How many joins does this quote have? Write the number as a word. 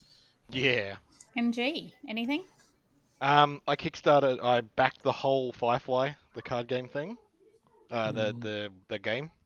one